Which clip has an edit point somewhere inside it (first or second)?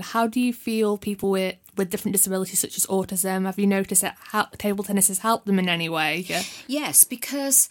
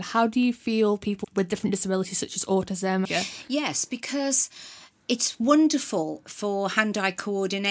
second